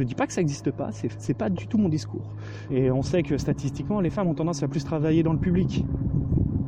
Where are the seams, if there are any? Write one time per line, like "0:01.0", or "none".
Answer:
0:02.7